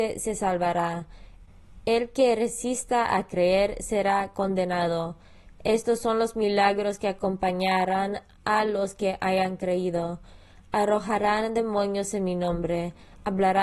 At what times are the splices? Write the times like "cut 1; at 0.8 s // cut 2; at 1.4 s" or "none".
none